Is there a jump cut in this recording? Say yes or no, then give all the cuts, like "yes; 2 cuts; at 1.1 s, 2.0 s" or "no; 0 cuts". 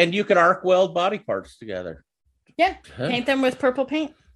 yes; 1 cut; at 2.8 s